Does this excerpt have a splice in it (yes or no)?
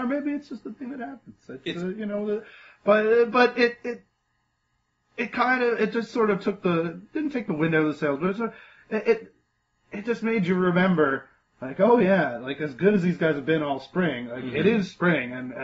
no